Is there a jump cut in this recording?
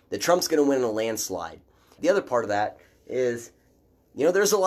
yes; 1 cut; at 2.0 s

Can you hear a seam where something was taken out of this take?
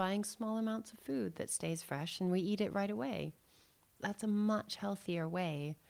yes; 1 cut; at 4.0 s

